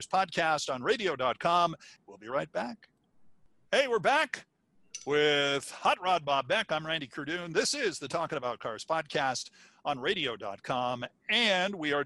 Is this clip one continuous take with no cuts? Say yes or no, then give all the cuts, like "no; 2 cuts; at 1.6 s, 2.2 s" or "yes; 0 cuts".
yes; 0 cuts